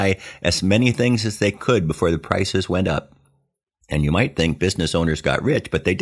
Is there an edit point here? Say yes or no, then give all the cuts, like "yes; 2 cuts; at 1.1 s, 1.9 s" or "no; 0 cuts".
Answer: no; 0 cuts